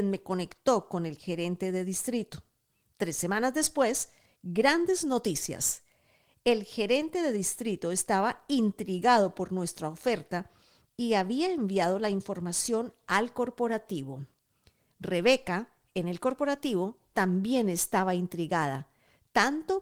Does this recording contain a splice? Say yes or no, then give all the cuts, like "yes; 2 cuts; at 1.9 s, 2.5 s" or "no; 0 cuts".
no; 0 cuts